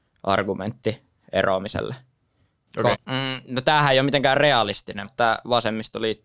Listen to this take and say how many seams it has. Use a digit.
2